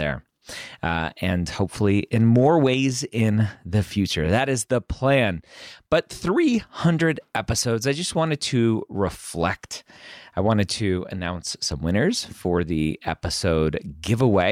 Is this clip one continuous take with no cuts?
yes; 0 cuts

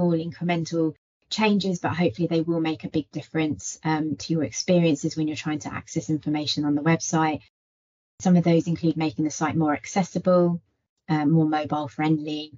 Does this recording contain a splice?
no; 0 cuts

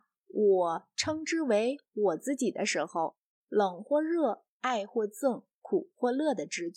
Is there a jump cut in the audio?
yes; 2 cuts; at 3.4 s, 4.5 s

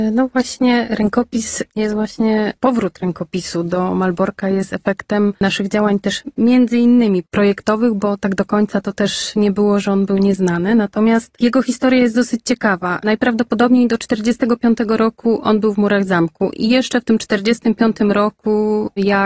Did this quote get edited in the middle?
no; 0 cuts

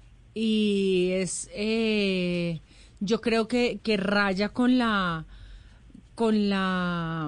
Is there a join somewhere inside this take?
yes; 1 cut; at 3.8 s

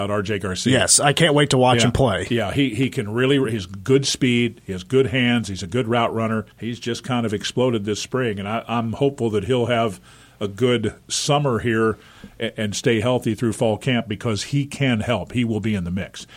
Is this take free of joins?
no; 1 cut; at 6.5 s

